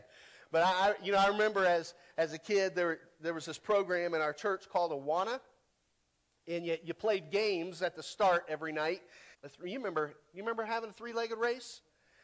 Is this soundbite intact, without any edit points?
no; 1 cut; at 9.3 s

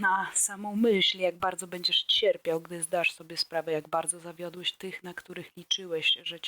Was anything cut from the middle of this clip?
no; 0 cuts

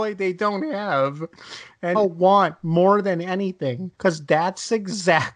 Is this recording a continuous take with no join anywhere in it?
no; 2 cuts; at 1.9 s, 3.9 s

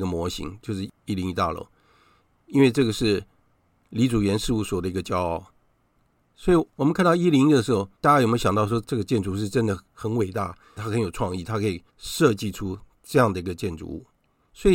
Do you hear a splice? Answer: yes; 2 cuts; at 7.9 s, 11.9 s

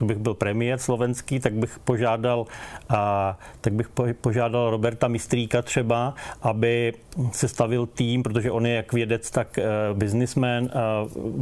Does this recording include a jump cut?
no; 0 cuts

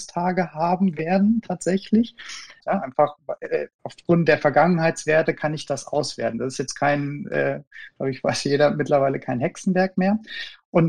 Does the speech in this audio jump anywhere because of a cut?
yes; 1 cut; at 2.6 s

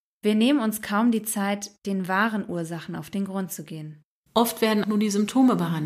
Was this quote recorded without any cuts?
no; 1 cut; at 4.8 s

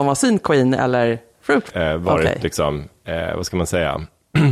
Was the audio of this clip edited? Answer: yes; 1 cut; at 1.7 s

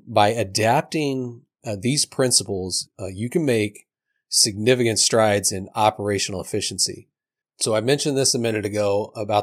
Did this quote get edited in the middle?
yes; 1 cut; at 7.4 s

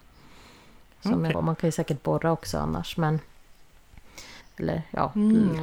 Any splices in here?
yes; 2 cuts; at 1.3 s, 4.4 s

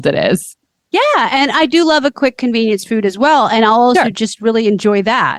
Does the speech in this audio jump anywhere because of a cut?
no; 0 cuts

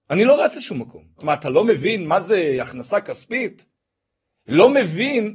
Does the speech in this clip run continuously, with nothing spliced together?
no; 1 cut; at 1.2 s

